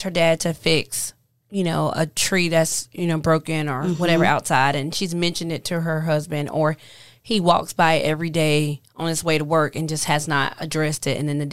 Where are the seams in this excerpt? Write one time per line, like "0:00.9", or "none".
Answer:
none